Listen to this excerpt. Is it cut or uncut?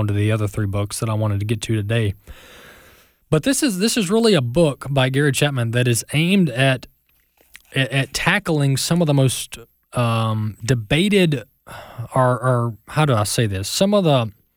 uncut